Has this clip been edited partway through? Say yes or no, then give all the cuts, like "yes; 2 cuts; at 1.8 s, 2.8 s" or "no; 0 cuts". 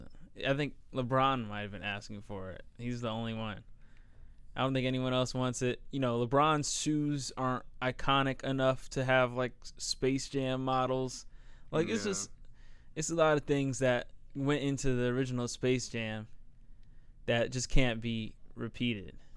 no; 0 cuts